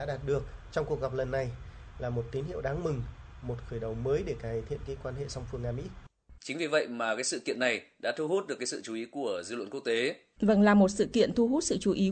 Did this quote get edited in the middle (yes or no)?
yes